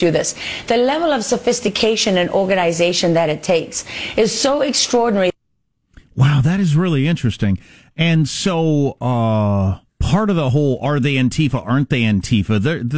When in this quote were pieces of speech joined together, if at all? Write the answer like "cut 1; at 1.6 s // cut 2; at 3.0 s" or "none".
cut 1; at 9.9 s